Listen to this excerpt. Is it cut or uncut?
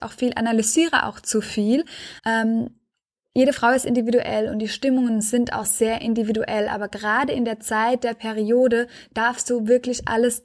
cut